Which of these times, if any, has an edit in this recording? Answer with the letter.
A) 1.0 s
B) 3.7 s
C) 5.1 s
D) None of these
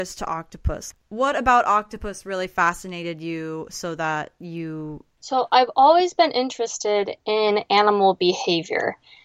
C